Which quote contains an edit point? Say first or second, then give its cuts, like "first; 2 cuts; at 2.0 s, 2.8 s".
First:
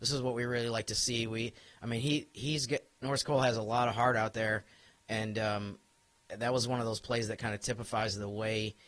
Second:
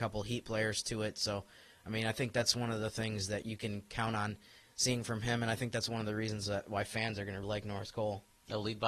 second; 2 cuts; at 3.4 s, 7.4 s